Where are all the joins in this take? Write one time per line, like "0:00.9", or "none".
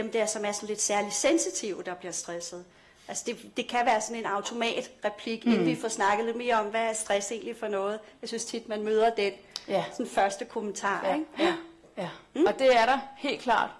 none